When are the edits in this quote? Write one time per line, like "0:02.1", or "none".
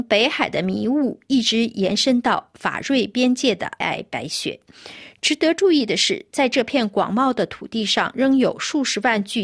0:03.8